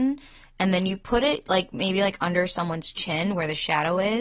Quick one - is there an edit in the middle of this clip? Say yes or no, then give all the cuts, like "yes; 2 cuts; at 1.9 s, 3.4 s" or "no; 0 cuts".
no; 0 cuts